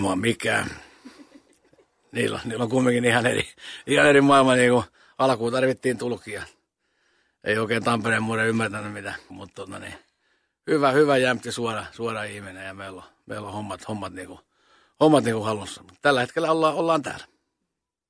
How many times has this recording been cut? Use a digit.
1